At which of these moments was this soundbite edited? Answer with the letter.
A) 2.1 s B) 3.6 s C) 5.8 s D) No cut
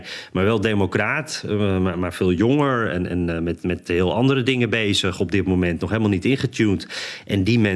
D